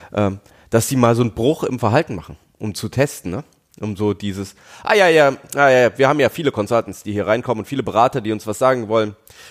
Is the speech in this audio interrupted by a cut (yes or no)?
no